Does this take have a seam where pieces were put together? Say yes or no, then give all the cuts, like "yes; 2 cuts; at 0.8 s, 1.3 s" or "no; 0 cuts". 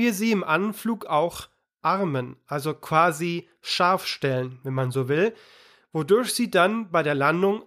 no; 0 cuts